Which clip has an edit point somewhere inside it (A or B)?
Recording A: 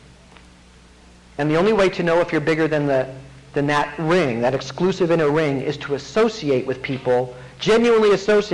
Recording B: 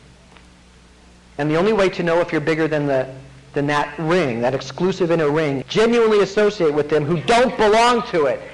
B